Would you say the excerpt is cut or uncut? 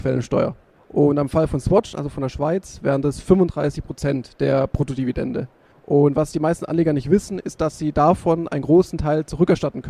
uncut